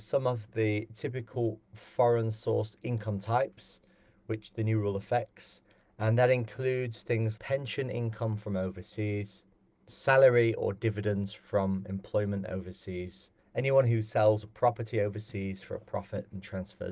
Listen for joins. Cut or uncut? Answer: cut